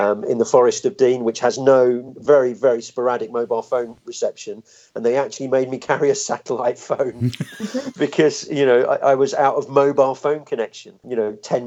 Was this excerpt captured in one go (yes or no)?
yes